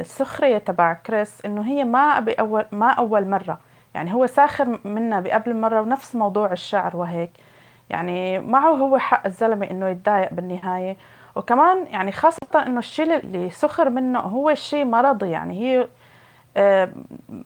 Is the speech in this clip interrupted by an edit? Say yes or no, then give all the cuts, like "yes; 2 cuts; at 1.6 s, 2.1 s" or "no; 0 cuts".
yes; 1 cut; at 13.2 s